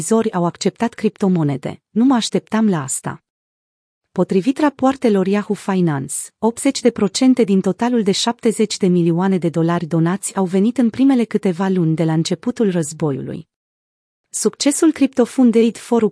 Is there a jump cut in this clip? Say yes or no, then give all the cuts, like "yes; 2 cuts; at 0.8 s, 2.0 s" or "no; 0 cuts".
no; 0 cuts